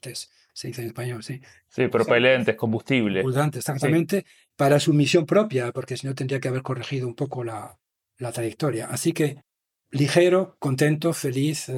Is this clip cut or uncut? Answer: uncut